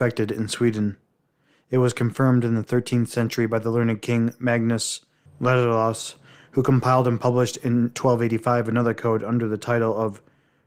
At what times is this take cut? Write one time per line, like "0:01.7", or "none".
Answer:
none